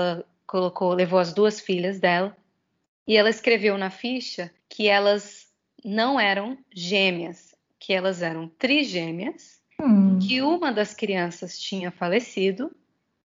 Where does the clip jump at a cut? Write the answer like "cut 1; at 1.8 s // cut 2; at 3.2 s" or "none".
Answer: cut 1; at 4.6 s // cut 2; at 9.7 s

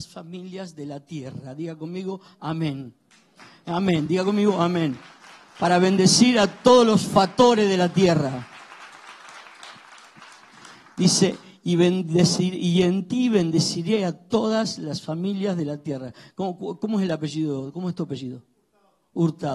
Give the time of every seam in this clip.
none

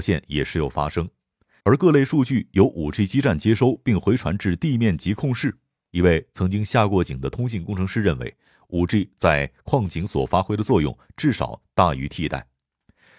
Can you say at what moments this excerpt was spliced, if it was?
cut 1; at 1.6 s // cut 2; at 5.9 s

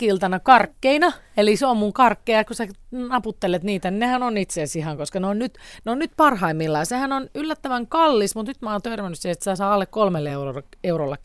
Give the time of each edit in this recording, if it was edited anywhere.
none

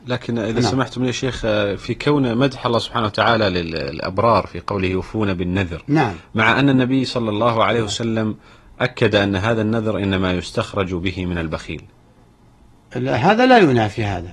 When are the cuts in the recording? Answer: none

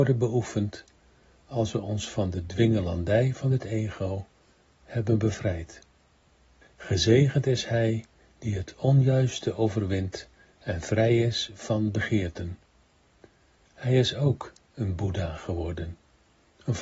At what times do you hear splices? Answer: cut 1; at 6.6 s

